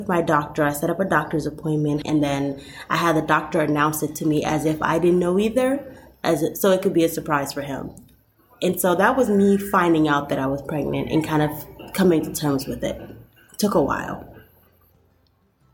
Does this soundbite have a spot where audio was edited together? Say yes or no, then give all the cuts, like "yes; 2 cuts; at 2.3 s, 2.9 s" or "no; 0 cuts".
yes; 1 cut; at 2.0 s